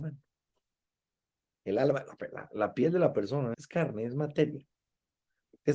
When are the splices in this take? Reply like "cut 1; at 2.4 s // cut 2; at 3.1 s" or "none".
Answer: cut 1; at 2.5 s // cut 2; at 3.5 s